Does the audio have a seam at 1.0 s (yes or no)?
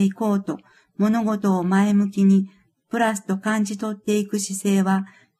no